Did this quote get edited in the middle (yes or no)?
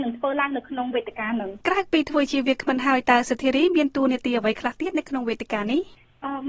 yes